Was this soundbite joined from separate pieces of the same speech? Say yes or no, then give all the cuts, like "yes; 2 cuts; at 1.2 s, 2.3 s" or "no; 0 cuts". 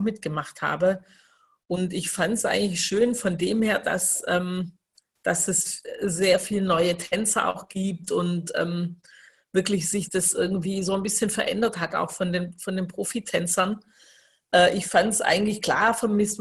no; 0 cuts